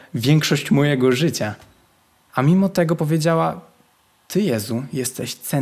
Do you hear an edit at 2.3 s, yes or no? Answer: yes